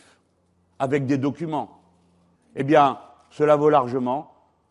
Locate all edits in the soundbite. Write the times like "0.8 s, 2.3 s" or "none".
2.3 s